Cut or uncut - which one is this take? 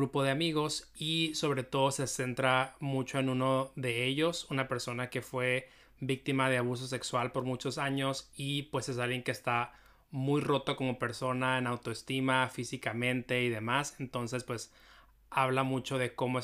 uncut